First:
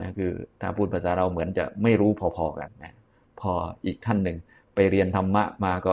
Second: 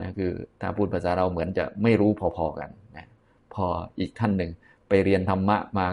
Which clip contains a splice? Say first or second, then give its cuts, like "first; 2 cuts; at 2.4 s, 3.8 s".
first; 1 cut; at 2.7 s